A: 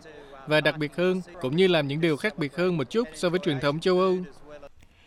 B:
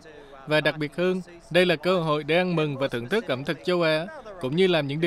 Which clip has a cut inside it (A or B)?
A